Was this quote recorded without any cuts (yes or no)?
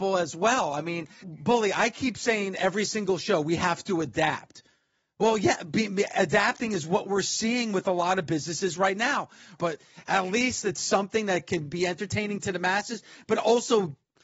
no